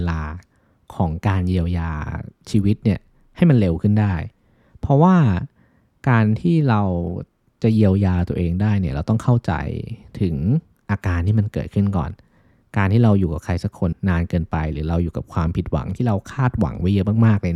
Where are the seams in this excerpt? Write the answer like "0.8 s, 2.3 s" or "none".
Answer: 13.9 s